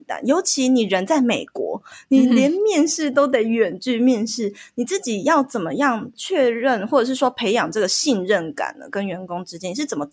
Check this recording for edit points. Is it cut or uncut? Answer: uncut